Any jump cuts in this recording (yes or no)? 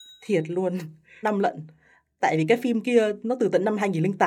yes